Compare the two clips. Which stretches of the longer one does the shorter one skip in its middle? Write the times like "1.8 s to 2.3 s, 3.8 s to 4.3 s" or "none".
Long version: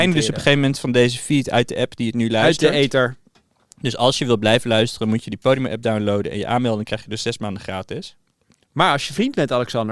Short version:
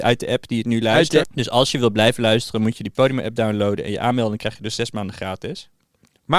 2.7 s to 3.7 s